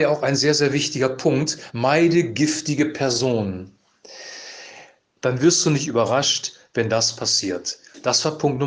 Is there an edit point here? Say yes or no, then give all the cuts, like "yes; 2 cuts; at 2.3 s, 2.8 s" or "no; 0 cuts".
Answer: yes; 2 cuts; at 1.7 s, 5.2 s